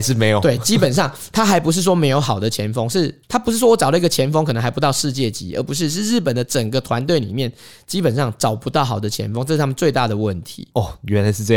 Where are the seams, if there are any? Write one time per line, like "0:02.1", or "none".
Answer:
0:03.2